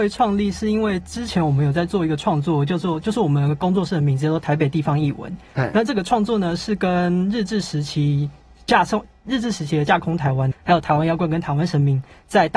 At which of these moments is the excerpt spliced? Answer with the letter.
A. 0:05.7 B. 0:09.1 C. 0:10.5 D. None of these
C